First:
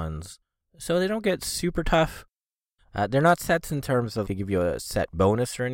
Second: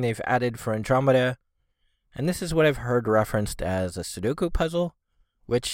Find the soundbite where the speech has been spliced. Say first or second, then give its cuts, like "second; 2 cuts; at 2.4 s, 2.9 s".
first; 2 cuts; at 2.8 s, 4.3 s